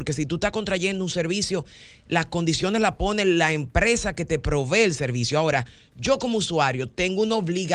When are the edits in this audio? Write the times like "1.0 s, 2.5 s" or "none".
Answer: none